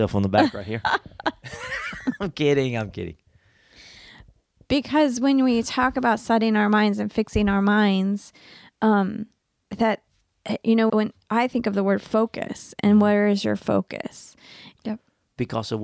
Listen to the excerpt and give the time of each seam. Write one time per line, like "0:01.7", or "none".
0:10.9
0:14.8

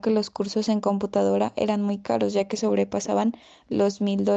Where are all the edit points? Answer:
none

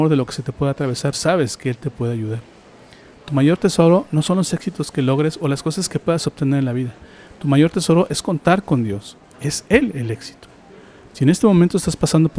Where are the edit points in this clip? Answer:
0:01.1
0:09.3
0:11.1

